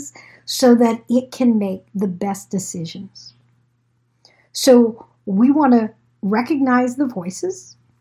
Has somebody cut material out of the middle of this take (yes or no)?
no